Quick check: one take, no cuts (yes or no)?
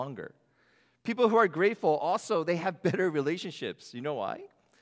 yes